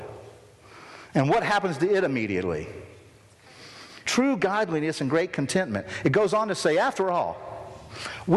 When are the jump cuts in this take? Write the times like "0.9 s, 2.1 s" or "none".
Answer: 4.0 s